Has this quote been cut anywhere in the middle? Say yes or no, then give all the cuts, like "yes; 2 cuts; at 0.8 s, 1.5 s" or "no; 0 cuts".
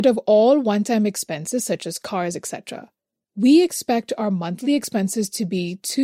no; 0 cuts